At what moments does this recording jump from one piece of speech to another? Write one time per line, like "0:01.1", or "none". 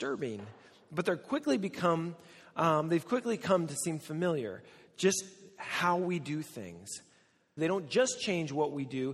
0:07.6